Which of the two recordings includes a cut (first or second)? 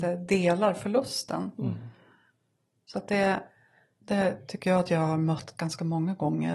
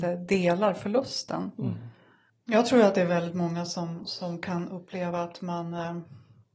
second